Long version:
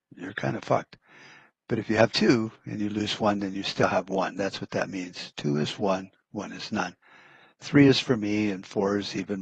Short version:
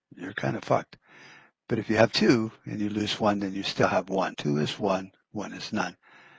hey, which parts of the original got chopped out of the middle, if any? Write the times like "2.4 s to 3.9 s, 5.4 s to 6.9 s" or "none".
4.3 s to 5.3 s

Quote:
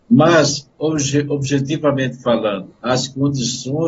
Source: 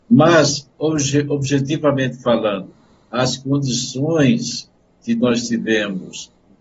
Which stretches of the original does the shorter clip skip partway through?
2.7 s to 3.0 s

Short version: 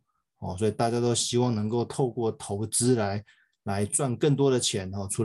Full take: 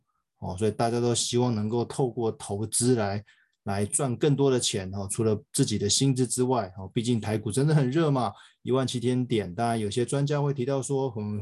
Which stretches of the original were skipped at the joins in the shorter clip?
none

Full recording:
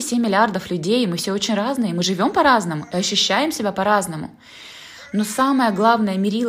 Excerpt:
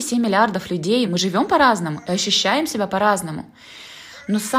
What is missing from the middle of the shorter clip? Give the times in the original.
1.1 s to 1.9 s

